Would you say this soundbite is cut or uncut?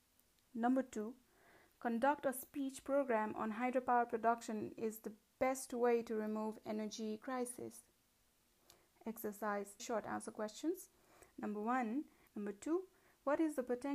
cut